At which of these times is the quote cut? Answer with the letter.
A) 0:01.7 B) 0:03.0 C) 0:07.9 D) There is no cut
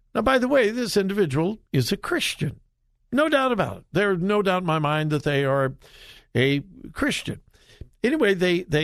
A